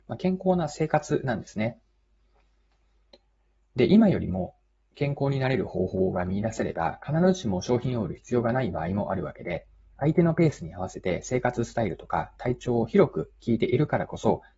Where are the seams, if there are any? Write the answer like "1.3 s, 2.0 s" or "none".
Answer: none